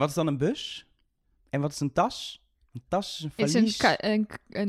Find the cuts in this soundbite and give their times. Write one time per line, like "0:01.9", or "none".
none